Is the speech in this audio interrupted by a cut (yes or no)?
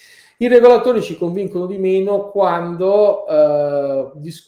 no